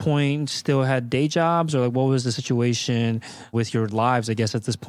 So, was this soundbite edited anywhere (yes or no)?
yes